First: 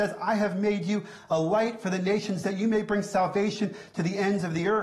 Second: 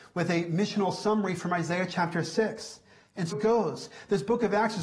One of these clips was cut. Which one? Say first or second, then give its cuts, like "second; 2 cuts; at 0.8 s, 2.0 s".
second; 1 cut; at 3.3 s